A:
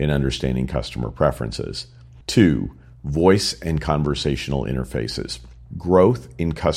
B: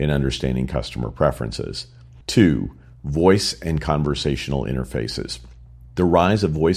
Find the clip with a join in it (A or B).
A